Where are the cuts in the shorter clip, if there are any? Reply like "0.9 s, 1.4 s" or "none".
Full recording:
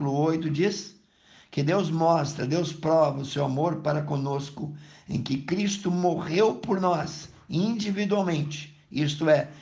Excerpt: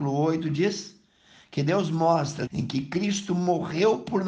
2.5 s